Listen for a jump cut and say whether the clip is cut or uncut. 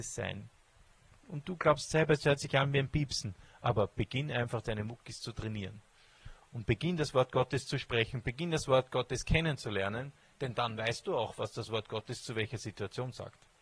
uncut